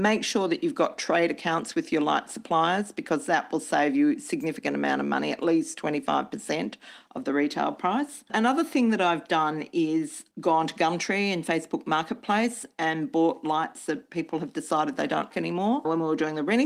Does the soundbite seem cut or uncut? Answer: cut